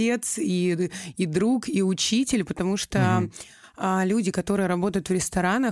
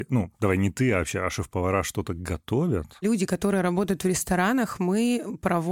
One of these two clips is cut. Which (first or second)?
second